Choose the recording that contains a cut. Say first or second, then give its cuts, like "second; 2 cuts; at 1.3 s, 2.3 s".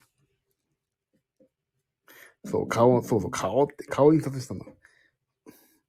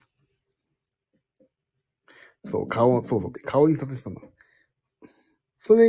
second; 1 cut; at 3.3 s